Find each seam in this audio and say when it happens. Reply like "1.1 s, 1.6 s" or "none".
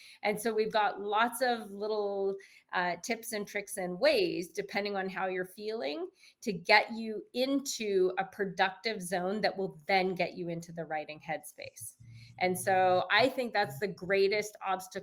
none